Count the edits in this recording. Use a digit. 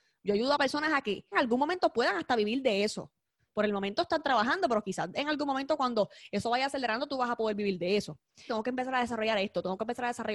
2